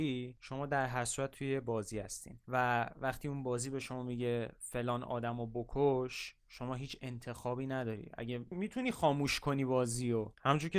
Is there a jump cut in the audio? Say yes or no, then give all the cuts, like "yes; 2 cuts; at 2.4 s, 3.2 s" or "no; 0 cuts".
yes; 1 cut; at 8.5 s